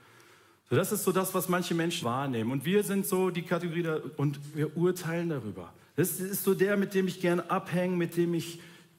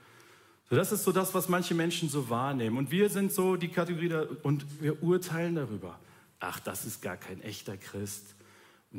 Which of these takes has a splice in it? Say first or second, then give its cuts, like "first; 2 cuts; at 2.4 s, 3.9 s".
first; 2 cuts; at 2.0 s, 5.8 s